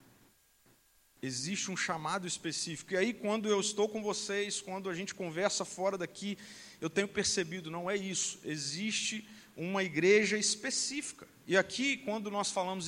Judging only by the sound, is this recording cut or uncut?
uncut